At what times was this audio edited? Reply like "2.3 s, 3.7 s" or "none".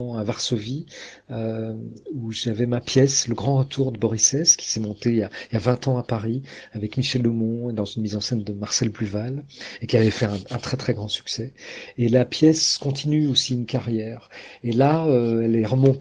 none